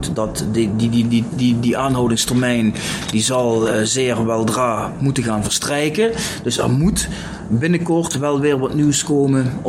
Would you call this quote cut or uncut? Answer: uncut